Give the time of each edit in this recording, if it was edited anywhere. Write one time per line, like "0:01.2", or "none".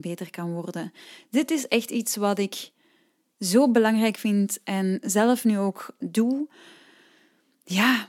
0:06.0